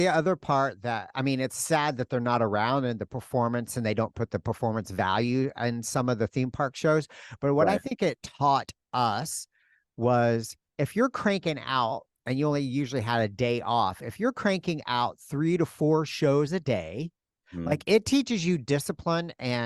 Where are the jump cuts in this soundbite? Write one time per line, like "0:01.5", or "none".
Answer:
none

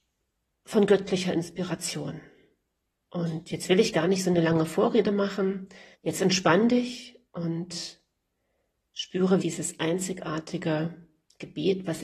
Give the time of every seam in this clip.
0:05.9
0:07.3
0:09.4

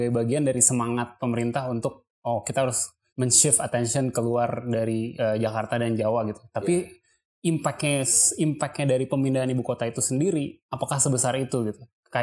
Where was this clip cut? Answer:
0:03.1

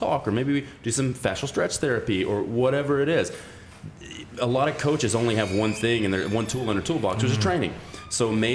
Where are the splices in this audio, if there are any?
none

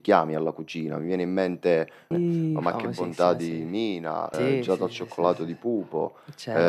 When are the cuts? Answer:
0:02.1
0:04.3

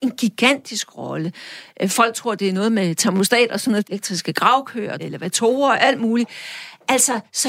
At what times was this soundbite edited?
0:03.8
0:05.0

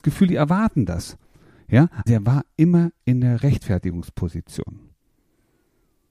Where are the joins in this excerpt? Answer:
0:02.1

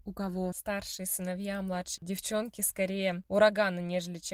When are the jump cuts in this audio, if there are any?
0:02.0

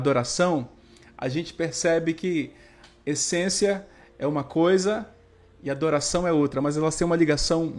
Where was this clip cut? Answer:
none

